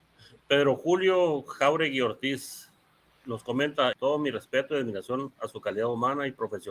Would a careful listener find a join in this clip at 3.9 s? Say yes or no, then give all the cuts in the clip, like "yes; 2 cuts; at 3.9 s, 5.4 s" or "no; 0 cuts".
yes; 1 cut; at 3.9 s